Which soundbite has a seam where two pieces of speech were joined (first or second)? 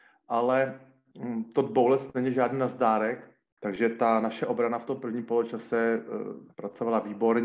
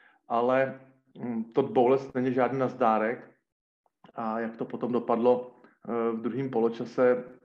first